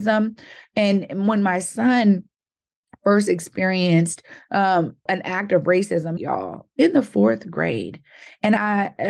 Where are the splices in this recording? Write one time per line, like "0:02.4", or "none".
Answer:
0:05.1
0:06.2